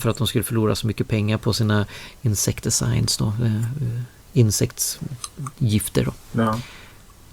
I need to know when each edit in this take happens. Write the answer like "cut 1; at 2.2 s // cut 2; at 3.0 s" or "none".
none